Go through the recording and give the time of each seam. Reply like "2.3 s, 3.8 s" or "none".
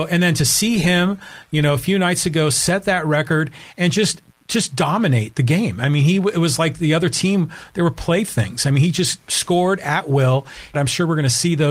10.7 s